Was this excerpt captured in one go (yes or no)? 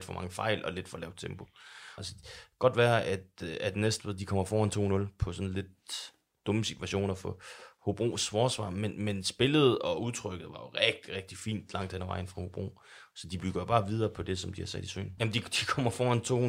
no